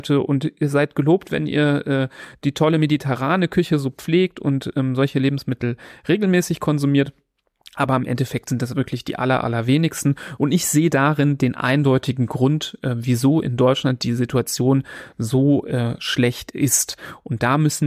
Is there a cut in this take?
no; 0 cuts

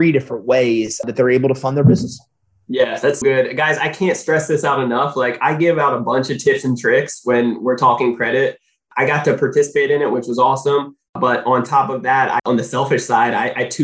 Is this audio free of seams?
no; 2 cuts; at 3.2 s, 12.4 s

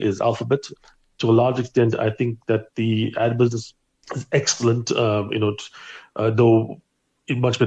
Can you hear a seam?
no; 0 cuts

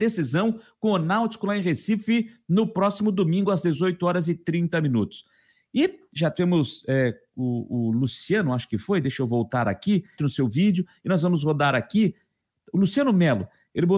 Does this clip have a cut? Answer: yes; 1 cut; at 10.2 s

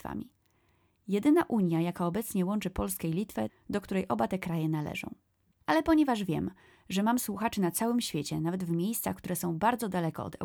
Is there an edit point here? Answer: yes; 2 cuts; at 3.5 s, 5.5 s

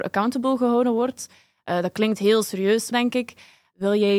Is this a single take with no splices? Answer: no; 1 cut; at 2.9 s

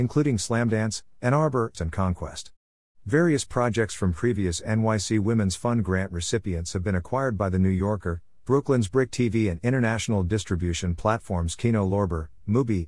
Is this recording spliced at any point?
yes; 1 cut; at 1.7 s

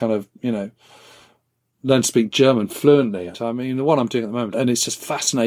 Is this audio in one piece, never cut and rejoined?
no; 2 cuts; at 3.3 s, 4.5 s

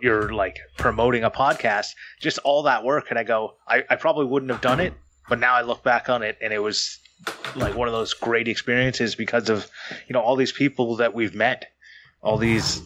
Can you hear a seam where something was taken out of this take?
no; 0 cuts

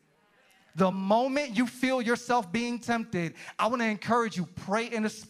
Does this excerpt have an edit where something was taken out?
yes; 1 cut; at 0.9 s

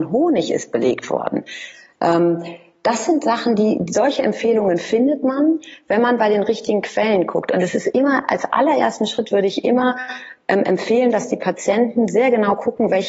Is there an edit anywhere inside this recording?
no; 0 cuts

